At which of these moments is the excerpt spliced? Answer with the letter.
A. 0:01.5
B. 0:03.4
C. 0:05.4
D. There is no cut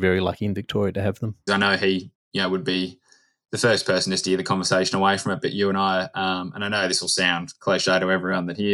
A